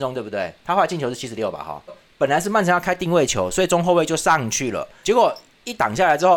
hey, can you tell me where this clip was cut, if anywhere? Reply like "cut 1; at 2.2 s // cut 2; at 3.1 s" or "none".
cut 1; at 1.9 s // cut 2; at 5.0 s